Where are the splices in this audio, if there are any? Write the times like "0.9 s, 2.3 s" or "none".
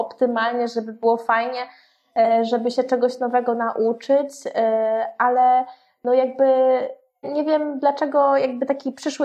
7.2 s